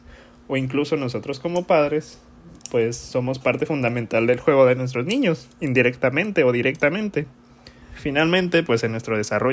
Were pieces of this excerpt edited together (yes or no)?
yes